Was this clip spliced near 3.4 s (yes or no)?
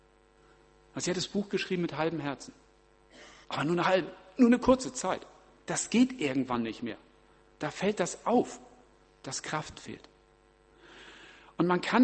yes